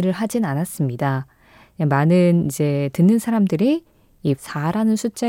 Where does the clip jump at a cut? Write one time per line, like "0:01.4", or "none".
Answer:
0:04.3